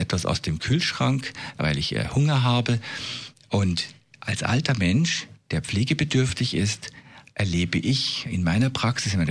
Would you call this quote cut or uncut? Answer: uncut